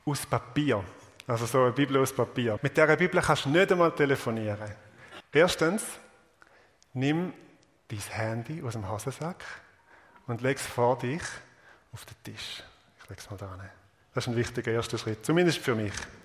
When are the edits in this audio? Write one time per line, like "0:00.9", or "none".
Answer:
0:02.6
0:05.2